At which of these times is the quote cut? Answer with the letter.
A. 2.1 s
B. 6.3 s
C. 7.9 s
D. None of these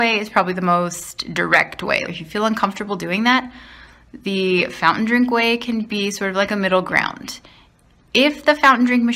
A